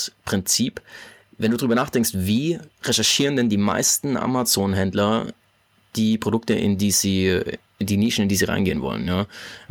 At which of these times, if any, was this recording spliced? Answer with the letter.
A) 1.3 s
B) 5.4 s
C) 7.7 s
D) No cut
D